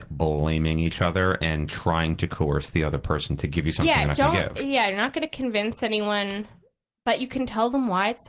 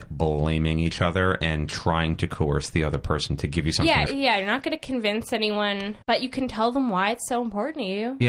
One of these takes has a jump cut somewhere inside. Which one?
second; 2 cuts; at 4.1 s, 6.0 s

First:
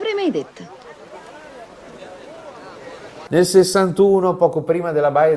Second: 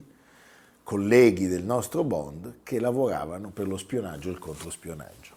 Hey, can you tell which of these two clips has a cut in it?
first; 1 cut; at 3.3 s

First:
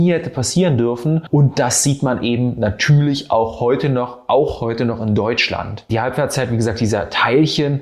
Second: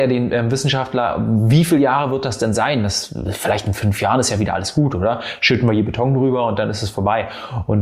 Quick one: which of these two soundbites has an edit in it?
first; 2 cuts; at 1.3 s, 5.9 s

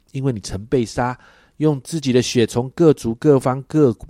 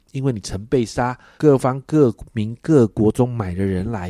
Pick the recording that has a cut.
second; 1 cut; at 1.4 s

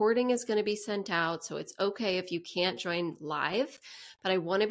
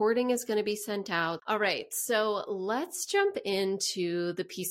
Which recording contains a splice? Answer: second; 1 cut; at 1.4 s

